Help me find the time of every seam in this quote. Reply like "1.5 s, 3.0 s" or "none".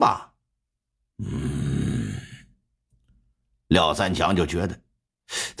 none